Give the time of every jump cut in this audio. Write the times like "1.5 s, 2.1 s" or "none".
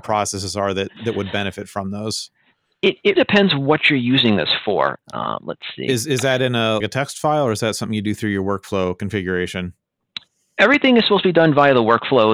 3.2 s, 5.0 s, 6.8 s